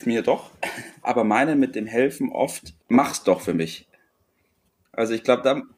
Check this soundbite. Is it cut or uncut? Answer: cut